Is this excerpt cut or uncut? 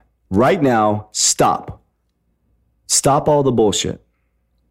uncut